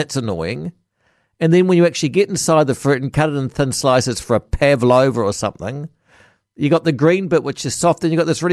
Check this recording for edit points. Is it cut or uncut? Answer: uncut